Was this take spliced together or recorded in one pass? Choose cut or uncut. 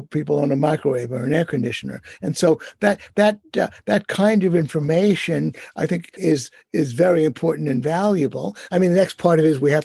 cut